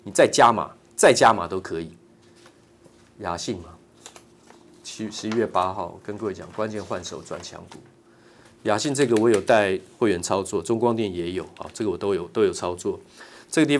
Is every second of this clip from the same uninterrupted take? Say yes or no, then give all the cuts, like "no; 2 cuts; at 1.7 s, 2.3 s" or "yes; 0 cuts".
yes; 0 cuts